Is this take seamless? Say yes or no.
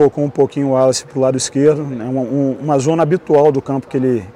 yes